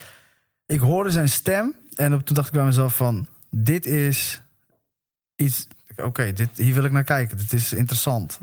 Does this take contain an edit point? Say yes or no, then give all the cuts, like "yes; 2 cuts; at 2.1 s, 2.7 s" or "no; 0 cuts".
no; 0 cuts